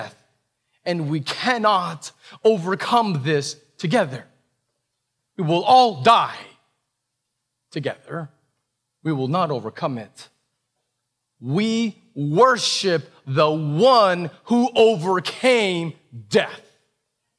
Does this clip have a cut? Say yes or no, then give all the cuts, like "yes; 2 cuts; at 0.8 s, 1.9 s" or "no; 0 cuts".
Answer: yes; 1 cut; at 5.2 s